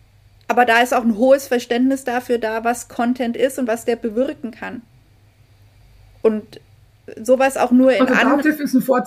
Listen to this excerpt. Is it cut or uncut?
uncut